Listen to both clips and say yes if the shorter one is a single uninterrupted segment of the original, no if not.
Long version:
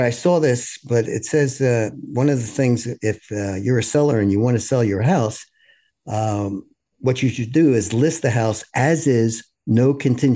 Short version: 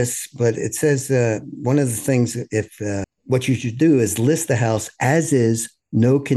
no